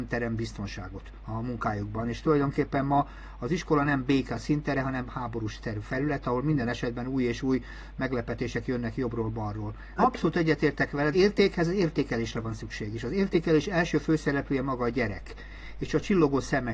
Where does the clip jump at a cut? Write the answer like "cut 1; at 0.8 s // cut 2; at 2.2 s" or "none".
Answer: cut 1; at 10.0 s // cut 2; at 11.1 s